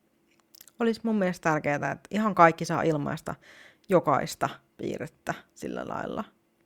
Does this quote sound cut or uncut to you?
uncut